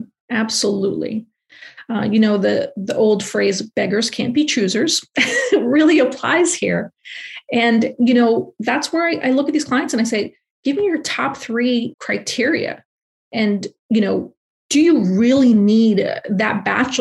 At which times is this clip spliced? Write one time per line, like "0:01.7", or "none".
0:11.9